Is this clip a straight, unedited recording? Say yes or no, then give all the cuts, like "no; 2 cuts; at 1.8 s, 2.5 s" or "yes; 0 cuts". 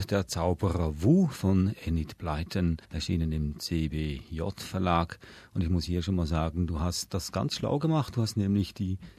no; 1 cut; at 2.8 s